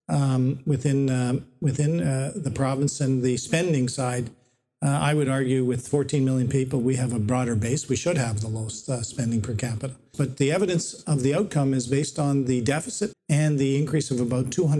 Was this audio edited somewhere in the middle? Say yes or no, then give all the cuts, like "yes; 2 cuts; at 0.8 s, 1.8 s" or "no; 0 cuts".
yes; 2 cuts; at 10.1 s, 13.1 s